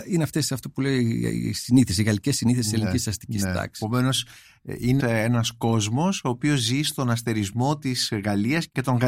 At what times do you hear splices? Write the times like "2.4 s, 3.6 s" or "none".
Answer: 5.0 s